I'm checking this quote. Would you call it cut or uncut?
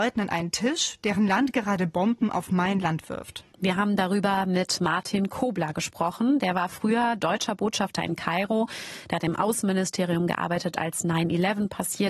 uncut